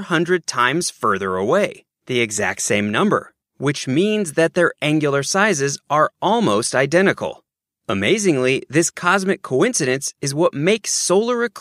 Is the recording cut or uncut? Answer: uncut